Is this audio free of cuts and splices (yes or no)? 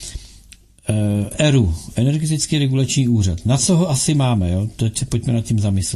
yes